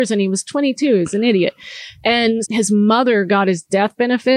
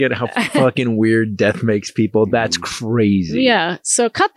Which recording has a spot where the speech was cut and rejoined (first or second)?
first